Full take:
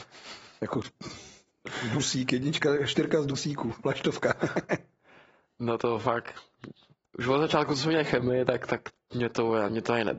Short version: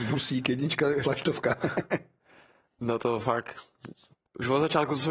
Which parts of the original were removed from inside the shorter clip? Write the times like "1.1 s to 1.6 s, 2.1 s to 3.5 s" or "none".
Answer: 2.9 s to 3.8 s